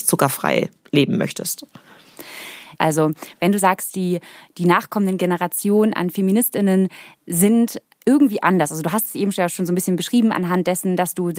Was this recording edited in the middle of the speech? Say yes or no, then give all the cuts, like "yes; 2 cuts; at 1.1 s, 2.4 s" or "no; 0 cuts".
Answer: yes; 1 cut; at 2.8 s